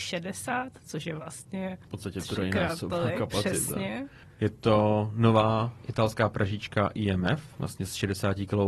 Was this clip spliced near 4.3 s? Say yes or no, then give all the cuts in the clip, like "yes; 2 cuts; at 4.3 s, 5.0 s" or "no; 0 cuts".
no; 1 cut; at 7.5 s